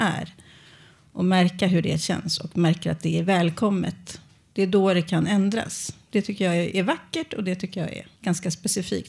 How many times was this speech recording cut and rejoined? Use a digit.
1